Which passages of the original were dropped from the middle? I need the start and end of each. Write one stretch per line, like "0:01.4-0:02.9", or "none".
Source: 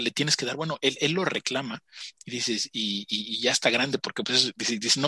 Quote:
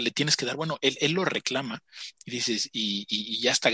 none